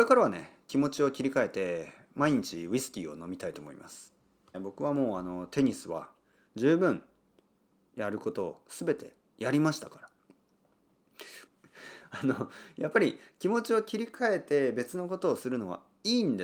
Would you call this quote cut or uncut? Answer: cut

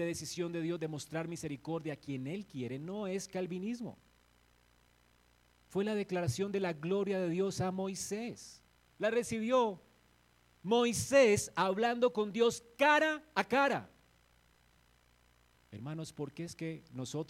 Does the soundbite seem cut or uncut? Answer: cut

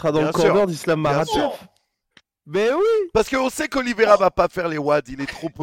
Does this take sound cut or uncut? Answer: uncut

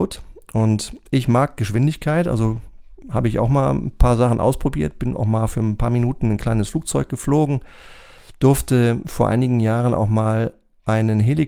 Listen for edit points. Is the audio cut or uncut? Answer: uncut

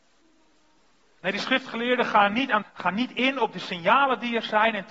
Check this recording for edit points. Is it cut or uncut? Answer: cut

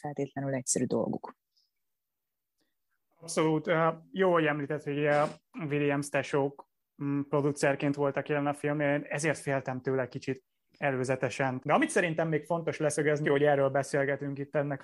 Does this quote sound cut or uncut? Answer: cut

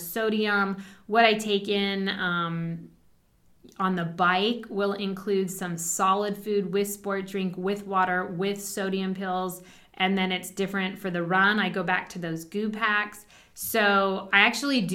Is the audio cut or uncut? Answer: uncut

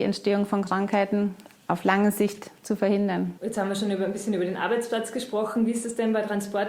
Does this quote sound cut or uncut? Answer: cut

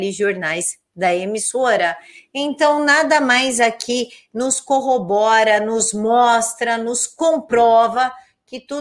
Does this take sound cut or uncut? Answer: uncut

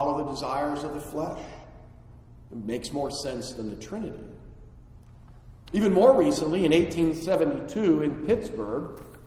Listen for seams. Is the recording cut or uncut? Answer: cut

